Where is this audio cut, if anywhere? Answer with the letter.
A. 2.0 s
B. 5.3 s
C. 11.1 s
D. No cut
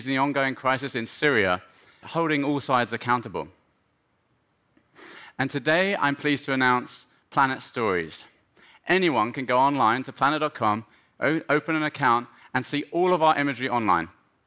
A